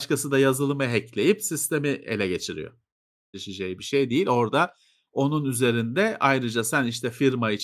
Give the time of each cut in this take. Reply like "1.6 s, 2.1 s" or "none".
3.3 s